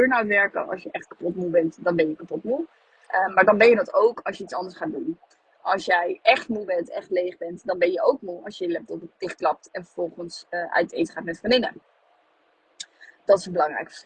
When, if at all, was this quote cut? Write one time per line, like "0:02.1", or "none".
0:09.1